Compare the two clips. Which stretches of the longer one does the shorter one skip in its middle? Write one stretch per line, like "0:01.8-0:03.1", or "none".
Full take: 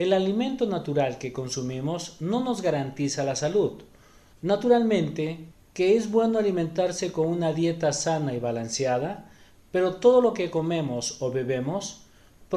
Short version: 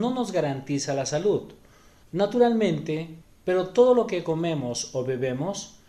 0:05.6-0:09.6